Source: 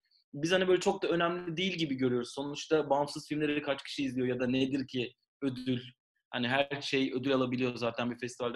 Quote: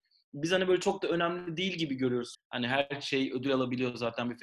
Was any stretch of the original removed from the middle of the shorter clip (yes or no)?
yes